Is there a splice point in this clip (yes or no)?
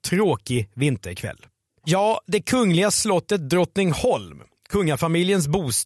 yes